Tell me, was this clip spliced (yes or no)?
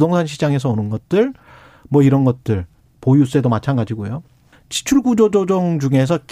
yes